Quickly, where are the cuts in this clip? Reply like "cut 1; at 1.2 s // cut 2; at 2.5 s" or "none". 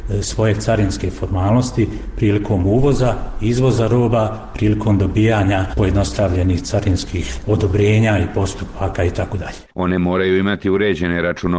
cut 1; at 9.7 s